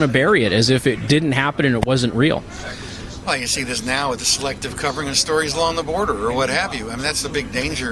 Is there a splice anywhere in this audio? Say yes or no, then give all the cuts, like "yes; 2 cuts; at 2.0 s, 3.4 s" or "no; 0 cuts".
no; 0 cuts